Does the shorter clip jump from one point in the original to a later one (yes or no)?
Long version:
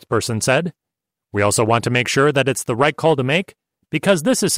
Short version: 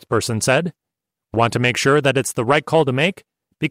yes